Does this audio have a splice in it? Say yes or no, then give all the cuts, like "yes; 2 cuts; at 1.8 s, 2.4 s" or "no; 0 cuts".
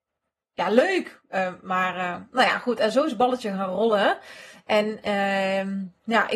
no; 0 cuts